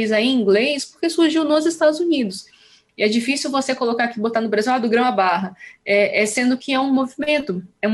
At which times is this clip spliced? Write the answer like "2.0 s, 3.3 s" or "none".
2.9 s

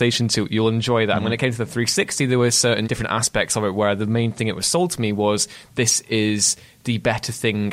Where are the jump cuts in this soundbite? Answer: 2.8 s

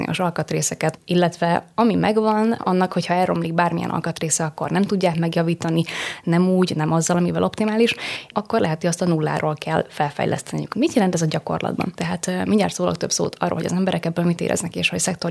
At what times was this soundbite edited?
8.3 s, 10.7 s, 11.9 s

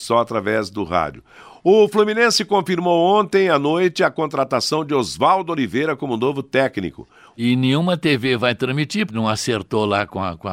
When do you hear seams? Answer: 7.3 s, 9.1 s

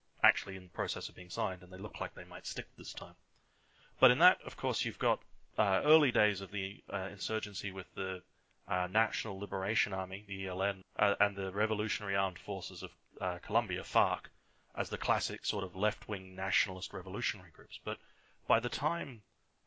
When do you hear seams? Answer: 10.8 s

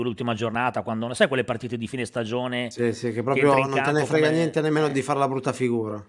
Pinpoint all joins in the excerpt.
none

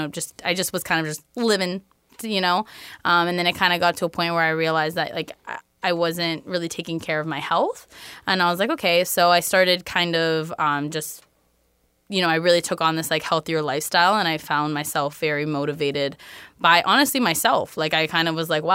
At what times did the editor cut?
none

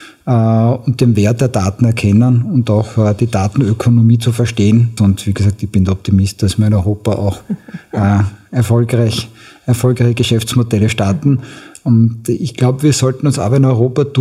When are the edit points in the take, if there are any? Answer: 5.0 s

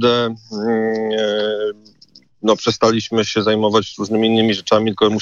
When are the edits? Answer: none

